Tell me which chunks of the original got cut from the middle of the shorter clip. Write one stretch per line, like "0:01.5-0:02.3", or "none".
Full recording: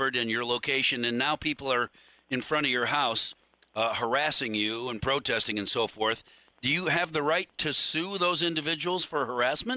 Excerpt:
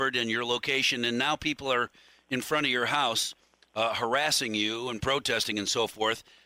none